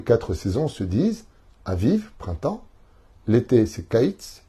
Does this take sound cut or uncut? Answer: uncut